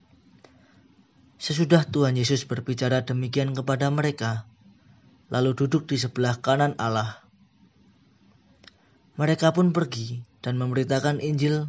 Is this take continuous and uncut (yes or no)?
no